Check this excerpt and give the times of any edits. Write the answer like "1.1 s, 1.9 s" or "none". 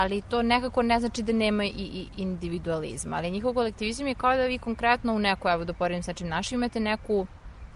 none